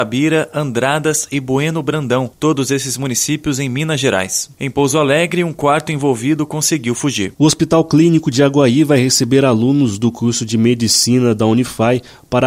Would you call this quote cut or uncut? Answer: cut